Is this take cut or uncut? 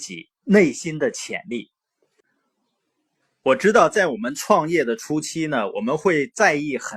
uncut